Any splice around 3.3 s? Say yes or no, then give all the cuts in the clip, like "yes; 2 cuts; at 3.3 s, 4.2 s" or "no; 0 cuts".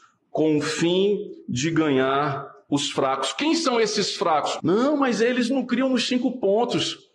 no; 1 cut; at 4.6 s